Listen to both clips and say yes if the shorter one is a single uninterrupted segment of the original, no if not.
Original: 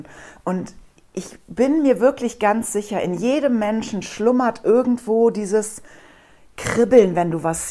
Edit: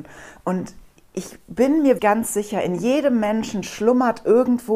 no